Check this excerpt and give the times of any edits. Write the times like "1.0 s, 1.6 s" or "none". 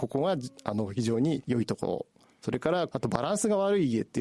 2.9 s